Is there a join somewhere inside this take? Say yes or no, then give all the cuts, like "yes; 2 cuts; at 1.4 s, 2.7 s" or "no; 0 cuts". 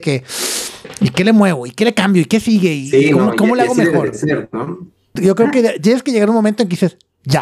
yes; 1 cut; at 5.2 s